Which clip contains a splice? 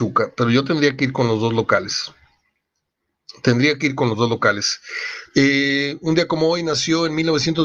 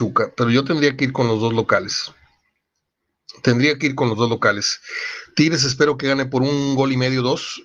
first; 1 cut; at 5.3 s

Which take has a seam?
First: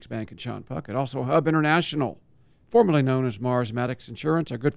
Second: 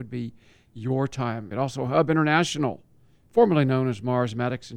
second; 1 cut; at 1.5 s

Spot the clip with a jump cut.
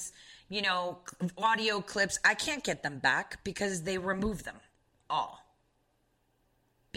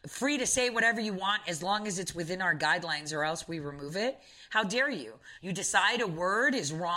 second; 1 cut; at 5.4 s

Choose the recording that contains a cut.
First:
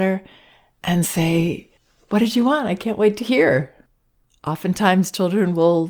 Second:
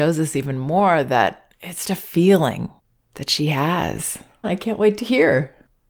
second; 2 cuts; at 1.8 s, 4.4 s

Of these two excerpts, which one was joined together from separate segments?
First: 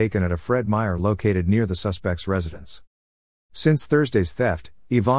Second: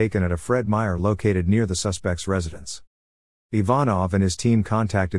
first; 1 cut; at 3.3 s

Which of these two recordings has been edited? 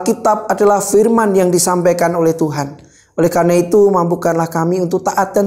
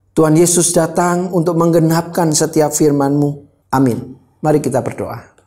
second; 1 cut; at 3.6 s

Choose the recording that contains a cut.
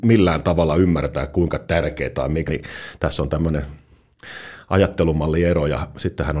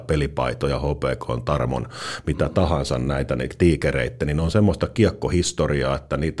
first; 1 cut; at 2.5 s

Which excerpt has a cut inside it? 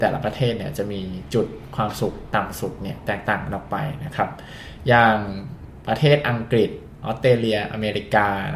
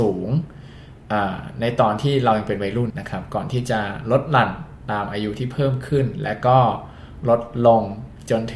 second; 1 cut; at 2.9 s

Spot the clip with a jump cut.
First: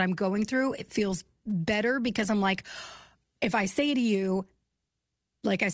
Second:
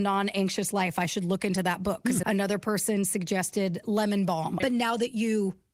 second; 2 cuts; at 2.2 s, 4.6 s

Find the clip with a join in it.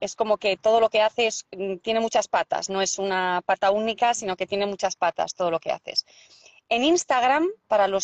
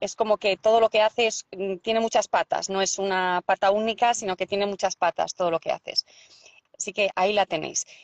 second; 1 cut; at 6.7 s

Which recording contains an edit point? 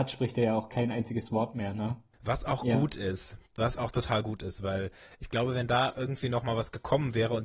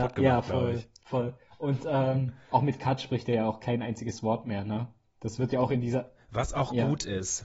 first; 1 cut; at 2.1 s

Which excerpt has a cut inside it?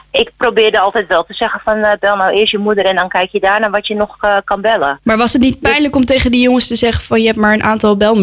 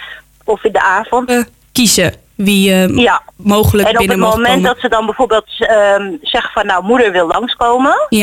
second; 2 cuts; at 1.3 s, 3.3 s

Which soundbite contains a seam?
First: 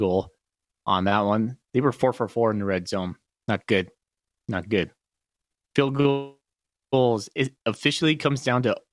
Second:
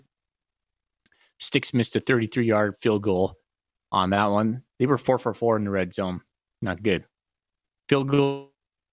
second; 1 cut; at 6.5 s

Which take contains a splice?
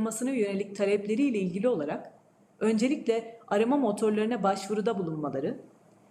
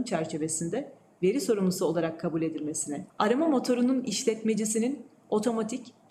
second; 1 cut; at 3.1 s

